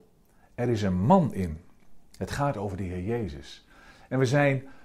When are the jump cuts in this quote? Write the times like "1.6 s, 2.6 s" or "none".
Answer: 2.1 s